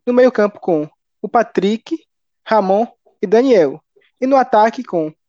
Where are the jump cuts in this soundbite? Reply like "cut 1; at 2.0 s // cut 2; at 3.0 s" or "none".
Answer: cut 1; at 4.1 s